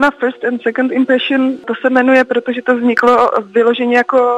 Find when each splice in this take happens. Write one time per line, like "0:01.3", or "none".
none